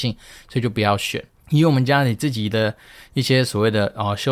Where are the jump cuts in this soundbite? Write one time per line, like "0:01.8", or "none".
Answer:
0:01.4